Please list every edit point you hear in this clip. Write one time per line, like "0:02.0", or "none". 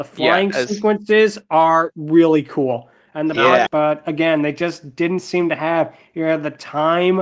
0:03.7